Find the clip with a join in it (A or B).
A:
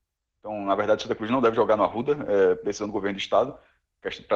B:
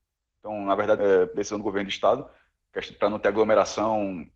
B